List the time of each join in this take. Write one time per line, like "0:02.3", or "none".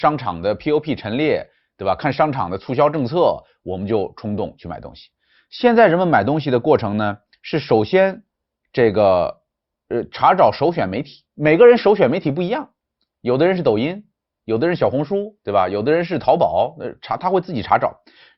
0:11.3